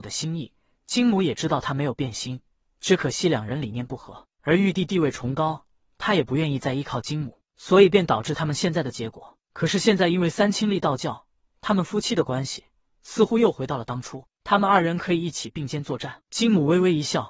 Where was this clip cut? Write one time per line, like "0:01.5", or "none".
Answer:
0:16.2